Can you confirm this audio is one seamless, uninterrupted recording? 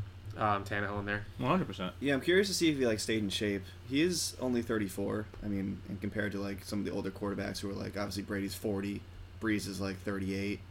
yes; 0 cuts

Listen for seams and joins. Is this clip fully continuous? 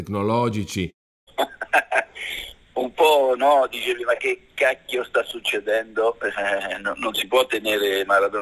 no; 1 cut; at 1.3 s

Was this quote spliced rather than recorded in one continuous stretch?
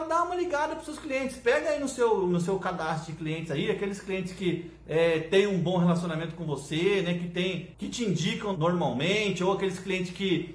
yes; 1 cut; at 7.7 s

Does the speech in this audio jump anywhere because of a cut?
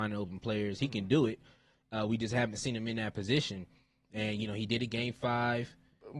no; 0 cuts

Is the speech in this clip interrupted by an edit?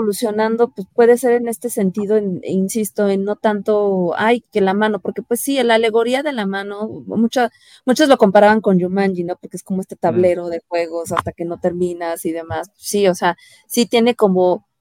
no; 0 cuts

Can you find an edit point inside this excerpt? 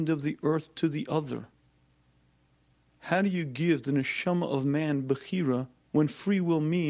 yes; 1 cut; at 5.8 s

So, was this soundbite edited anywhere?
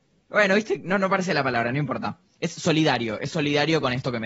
no; 0 cuts

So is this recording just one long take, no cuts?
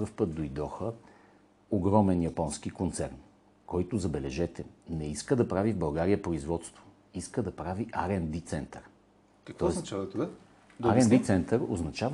yes; 0 cuts

